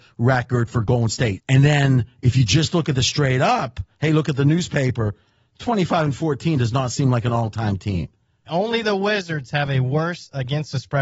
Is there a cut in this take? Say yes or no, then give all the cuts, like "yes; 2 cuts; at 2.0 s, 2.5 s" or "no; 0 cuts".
yes; 2 cuts; at 1.4 s, 8.5 s